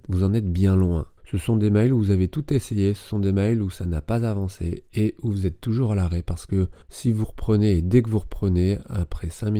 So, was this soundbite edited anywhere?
yes; 2 cuts; at 1.2 s, 6.8 s

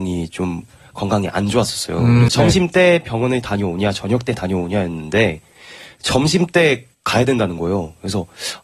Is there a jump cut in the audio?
yes; 2 cuts; at 2.3 s, 6.9 s

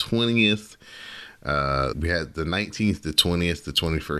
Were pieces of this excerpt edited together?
yes; 1 cut; at 1.9 s

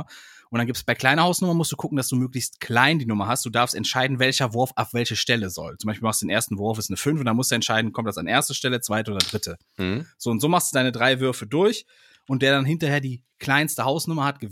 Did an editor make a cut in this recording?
no; 0 cuts

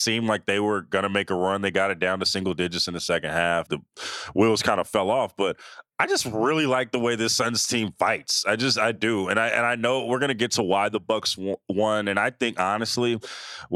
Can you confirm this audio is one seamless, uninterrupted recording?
no; 1 cut; at 3.7 s

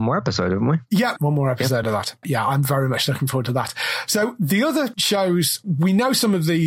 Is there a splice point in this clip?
no; 0 cuts

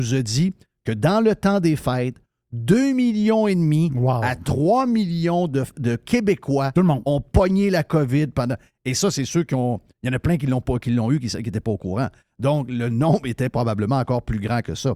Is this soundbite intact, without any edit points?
yes; 0 cuts

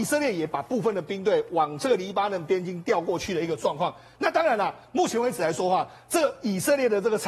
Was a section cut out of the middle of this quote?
no; 0 cuts

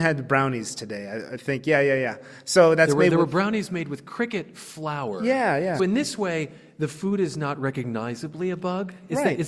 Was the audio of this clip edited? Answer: yes; 1 cut; at 5.8 s

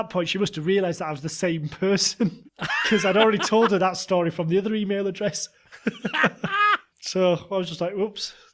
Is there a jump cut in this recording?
no; 0 cuts

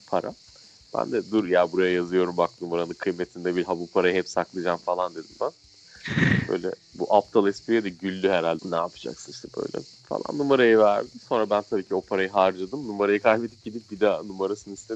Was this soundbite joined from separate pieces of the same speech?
yes; 2 cuts; at 3.7 s, 8.6 s

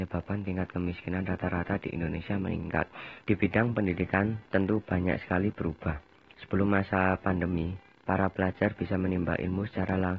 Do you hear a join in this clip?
yes; 1 cut; at 3.2 s

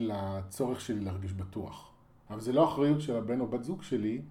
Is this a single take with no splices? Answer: no; 1 cut; at 2.3 s

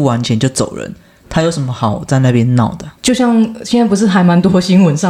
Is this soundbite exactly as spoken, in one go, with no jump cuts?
no; 1 cut; at 3.0 s

